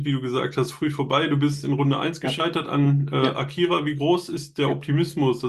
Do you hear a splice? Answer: no; 0 cuts

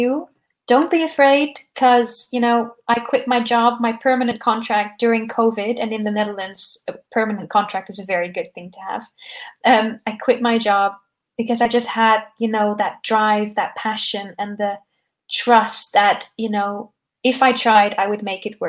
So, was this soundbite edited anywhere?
no; 0 cuts

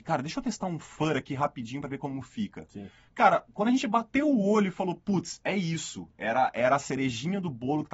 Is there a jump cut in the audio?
no; 0 cuts

